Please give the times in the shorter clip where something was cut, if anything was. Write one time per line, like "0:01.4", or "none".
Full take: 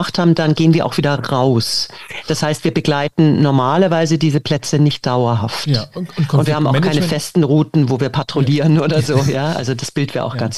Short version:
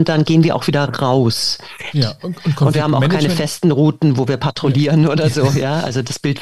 0:01.9